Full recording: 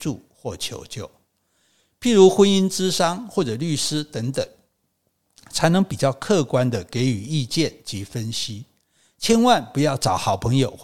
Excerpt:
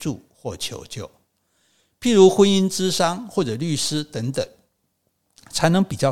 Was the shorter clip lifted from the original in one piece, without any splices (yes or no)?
yes